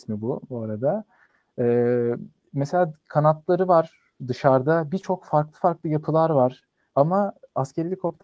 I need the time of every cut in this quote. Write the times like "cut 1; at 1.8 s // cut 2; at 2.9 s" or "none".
cut 1; at 4.2 s // cut 2; at 6.9 s